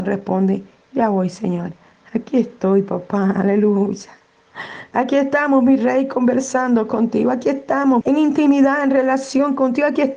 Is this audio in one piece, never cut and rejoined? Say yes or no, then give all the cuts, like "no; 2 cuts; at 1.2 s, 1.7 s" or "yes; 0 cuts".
no; 1 cut; at 8.0 s